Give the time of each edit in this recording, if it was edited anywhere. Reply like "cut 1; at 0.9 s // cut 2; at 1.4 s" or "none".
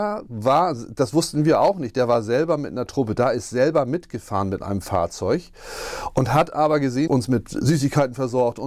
cut 1; at 7.1 s